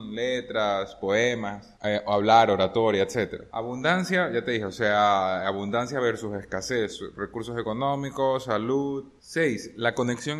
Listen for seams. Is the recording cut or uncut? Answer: uncut